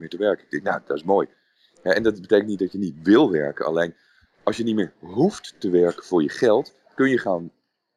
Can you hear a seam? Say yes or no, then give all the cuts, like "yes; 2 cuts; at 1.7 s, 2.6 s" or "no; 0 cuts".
no; 0 cuts